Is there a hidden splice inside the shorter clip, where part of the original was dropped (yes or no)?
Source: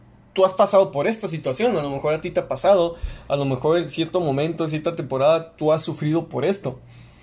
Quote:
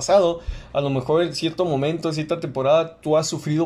no